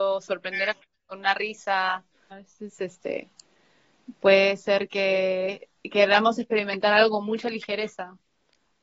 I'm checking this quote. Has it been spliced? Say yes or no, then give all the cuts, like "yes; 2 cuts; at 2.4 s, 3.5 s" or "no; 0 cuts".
yes; 2 cuts; at 2.3 s, 5.8 s